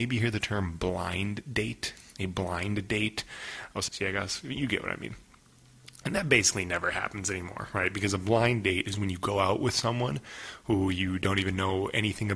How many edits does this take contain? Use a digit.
1